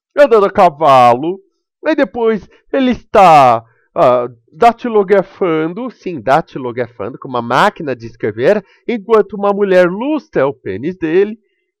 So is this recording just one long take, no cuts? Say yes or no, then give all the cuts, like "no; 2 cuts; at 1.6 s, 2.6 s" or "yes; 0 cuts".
yes; 0 cuts